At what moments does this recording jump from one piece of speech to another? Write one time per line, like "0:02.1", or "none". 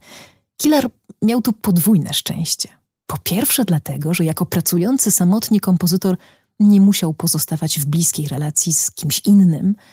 none